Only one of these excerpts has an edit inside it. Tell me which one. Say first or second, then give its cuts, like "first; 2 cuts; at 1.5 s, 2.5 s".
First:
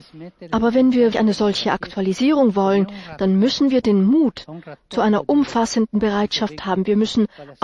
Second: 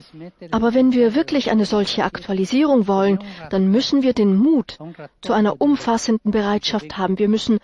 first; 1 cut; at 1.1 s